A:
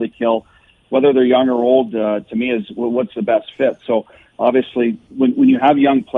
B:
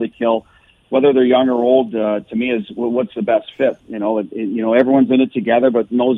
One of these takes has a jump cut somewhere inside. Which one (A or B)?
B